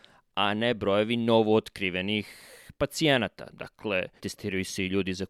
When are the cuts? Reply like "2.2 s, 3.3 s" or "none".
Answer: 4.2 s

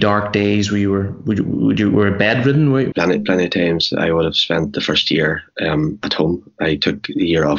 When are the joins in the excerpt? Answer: 2.9 s

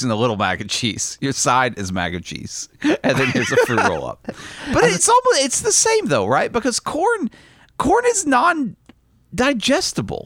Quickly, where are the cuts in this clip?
5.0 s

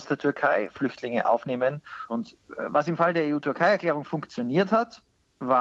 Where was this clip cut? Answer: 2.1 s

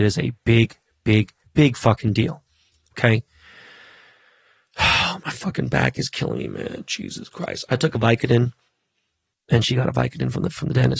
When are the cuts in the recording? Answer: 1.5 s, 9.3 s

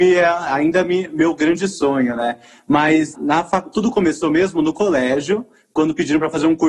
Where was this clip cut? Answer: 3.1 s

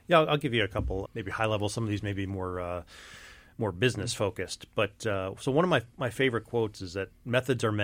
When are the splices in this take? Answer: 1.1 s

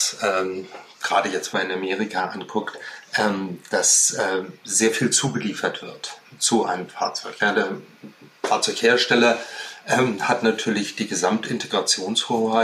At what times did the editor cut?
1.5 s

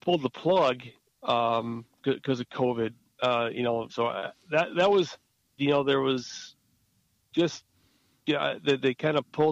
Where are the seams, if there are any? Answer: 3.9 s, 5.6 s

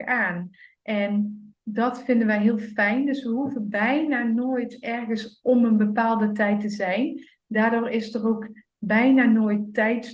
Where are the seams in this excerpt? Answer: none

